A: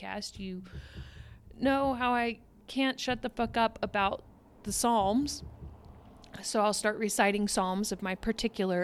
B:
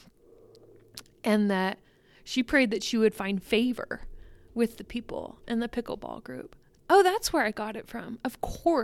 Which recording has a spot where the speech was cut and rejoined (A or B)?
B